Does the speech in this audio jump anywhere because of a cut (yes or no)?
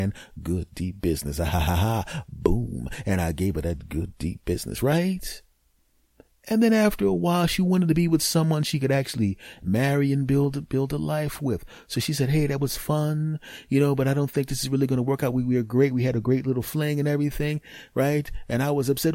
no